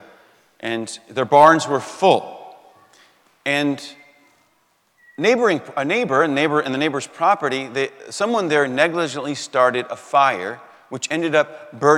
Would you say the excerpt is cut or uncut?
uncut